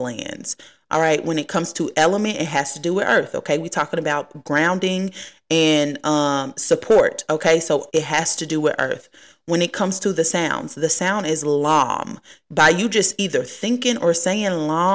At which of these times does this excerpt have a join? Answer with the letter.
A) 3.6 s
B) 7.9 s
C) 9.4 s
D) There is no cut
B